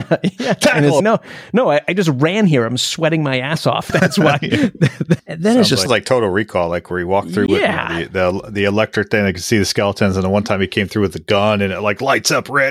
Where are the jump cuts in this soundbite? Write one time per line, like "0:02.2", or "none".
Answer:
0:05.2